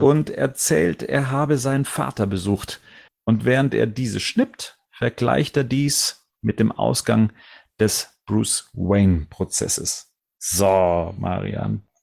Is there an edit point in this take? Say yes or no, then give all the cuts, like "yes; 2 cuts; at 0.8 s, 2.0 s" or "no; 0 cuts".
yes; 1 cut; at 3.1 s